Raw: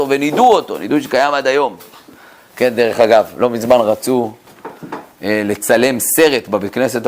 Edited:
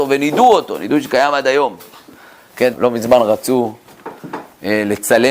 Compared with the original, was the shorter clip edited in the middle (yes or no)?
yes